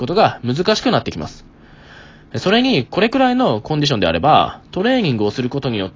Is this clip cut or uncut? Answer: uncut